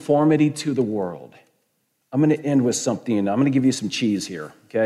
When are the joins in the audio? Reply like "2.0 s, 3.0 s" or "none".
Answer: 2.0 s